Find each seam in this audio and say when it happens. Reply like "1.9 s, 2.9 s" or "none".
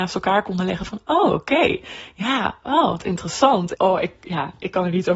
3.7 s